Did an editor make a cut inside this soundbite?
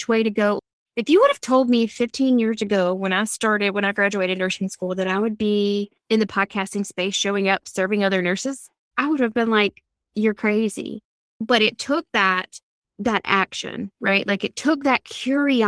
no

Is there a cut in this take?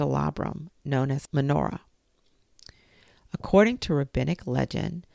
yes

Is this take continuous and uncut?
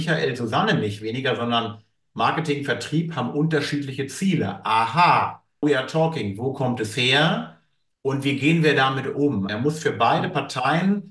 no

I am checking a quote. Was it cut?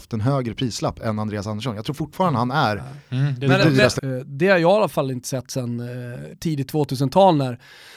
yes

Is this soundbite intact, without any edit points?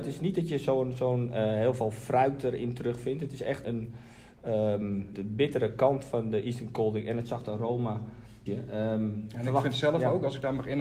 no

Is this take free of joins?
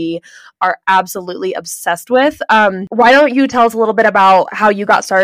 yes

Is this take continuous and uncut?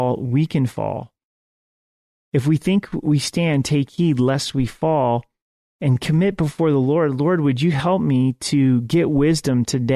yes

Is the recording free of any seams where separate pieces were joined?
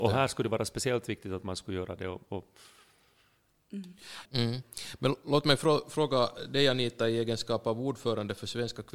no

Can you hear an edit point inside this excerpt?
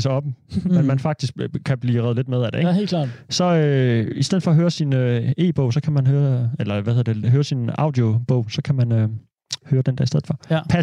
no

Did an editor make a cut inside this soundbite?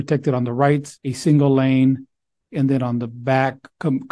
yes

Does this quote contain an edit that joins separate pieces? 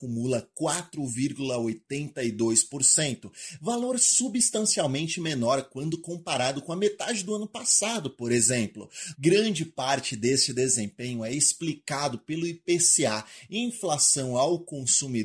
yes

